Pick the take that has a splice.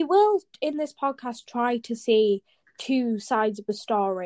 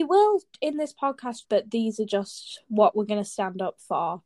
second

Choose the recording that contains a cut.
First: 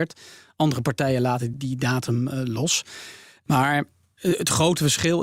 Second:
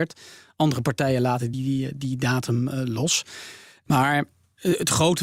first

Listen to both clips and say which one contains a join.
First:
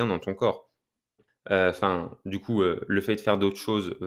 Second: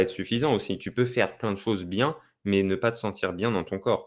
first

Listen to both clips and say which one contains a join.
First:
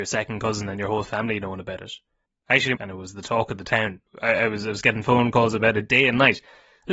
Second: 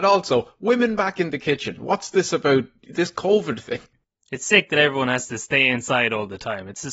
first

